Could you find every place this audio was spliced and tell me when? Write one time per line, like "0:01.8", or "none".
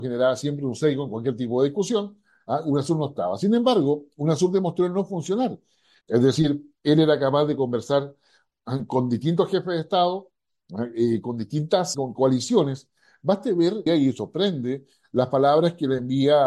0:06.0
0:11.9
0:13.9